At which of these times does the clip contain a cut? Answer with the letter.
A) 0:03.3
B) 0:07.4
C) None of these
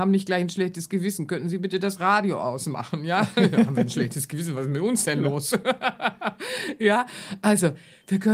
C